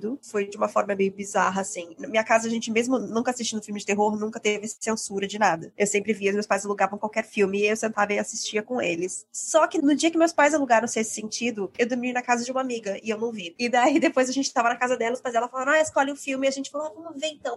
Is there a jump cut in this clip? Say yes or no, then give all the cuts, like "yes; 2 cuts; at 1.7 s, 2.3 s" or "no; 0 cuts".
no; 0 cuts